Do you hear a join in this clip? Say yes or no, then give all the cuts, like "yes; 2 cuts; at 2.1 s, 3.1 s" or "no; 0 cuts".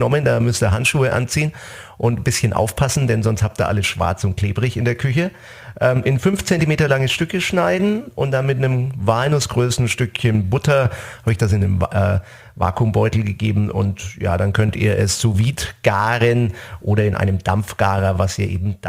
no; 0 cuts